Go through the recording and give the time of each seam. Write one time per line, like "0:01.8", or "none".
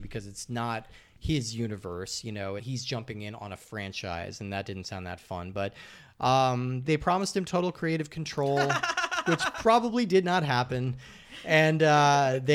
0:02.6
0:06.8